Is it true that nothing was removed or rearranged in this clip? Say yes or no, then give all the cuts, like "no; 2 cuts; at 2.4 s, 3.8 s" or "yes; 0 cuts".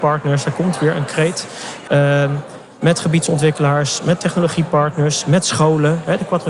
no; 1 cut; at 1.9 s